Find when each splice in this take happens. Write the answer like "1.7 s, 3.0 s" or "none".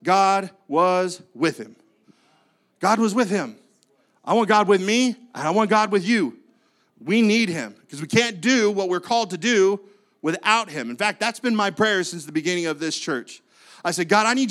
none

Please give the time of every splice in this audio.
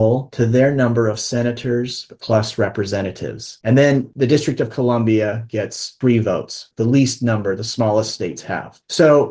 6.7 s

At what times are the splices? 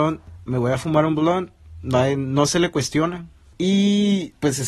none

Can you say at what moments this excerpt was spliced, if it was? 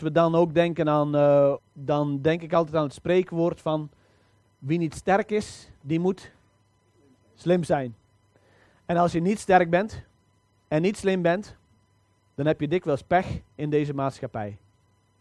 1.6 s

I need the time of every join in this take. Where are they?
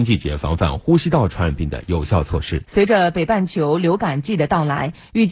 2.7 s

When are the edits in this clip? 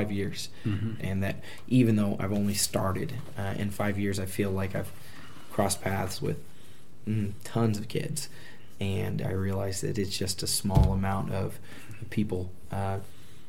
1.0 s

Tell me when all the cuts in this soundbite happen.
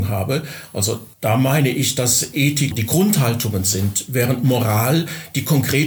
1.1 s, 2.7 s

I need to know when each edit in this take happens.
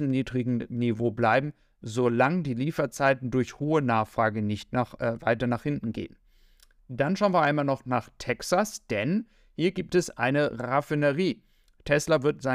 none

